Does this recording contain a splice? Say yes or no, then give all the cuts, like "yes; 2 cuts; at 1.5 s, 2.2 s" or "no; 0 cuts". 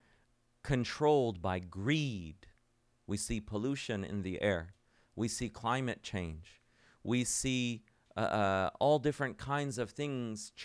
no; 0 cuts